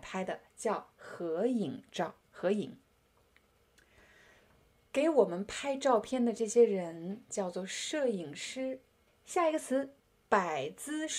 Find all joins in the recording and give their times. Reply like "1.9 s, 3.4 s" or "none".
2.2 s, 9.1 s